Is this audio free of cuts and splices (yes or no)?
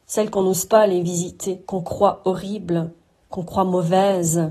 no